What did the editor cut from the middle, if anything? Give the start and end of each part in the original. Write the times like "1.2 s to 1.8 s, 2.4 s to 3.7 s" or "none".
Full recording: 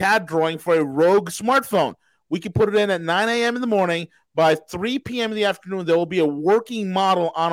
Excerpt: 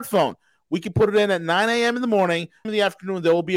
4.2 s to 5.3 s